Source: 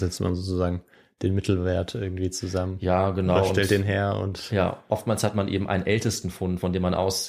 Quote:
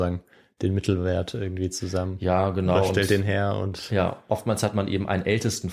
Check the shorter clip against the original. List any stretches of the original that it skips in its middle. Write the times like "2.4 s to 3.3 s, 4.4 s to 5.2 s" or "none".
none